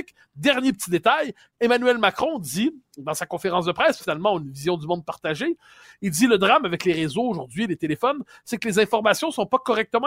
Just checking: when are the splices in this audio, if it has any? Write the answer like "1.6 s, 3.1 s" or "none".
4.0 s